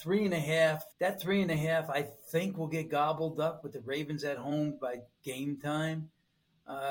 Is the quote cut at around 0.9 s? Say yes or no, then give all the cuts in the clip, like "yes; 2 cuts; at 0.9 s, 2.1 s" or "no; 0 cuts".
yes; 1 cut; at 0.9 s